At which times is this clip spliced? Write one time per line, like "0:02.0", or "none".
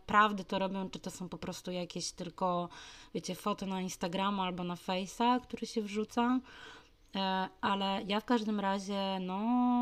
none